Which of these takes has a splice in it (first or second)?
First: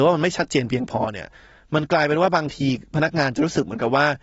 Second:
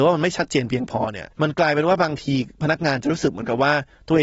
second